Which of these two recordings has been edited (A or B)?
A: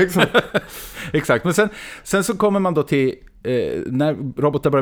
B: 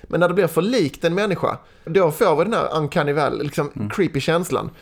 B